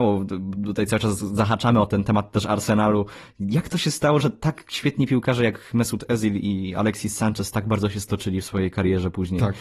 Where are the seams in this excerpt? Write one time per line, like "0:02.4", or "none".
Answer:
none